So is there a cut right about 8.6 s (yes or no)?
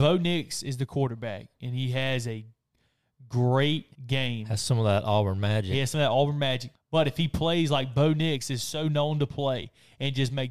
no